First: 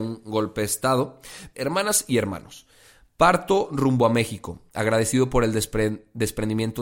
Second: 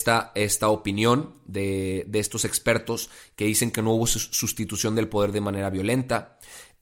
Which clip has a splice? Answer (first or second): first